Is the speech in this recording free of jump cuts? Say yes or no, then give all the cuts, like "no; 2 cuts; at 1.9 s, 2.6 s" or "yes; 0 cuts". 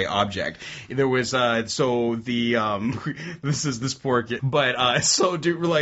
no; 1 cut; at 4.4 s